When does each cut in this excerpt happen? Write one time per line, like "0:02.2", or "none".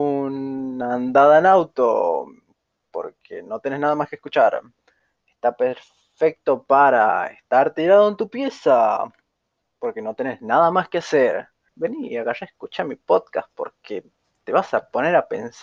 0:11.7